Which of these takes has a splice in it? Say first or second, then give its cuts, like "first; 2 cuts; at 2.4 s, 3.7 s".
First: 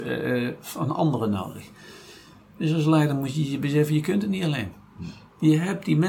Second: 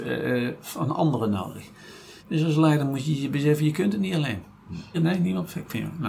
second; 2 cuts; at 2.2 s, 4.9 s